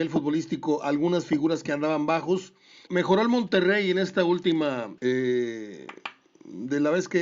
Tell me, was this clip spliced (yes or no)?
yes